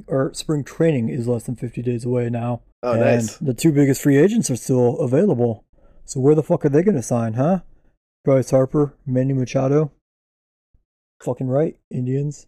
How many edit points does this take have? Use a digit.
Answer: 1